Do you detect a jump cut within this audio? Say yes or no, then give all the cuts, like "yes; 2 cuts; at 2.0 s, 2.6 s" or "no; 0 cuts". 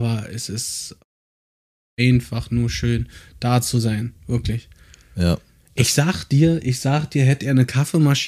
no; 0 cuts